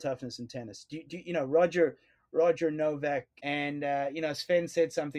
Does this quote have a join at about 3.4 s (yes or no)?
yes